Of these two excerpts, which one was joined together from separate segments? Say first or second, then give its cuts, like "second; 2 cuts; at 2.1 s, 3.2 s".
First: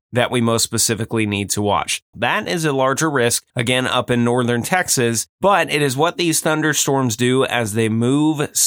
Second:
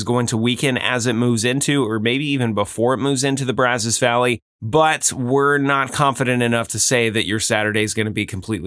first; 2 cuts; at 2.1 s, 3.5 s